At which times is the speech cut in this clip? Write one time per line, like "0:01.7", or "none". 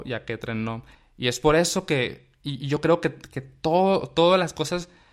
0:00.9